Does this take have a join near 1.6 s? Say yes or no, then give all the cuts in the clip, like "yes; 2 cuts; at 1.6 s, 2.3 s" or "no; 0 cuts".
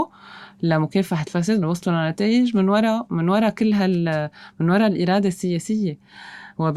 yes; 1 cut; at 1.6 s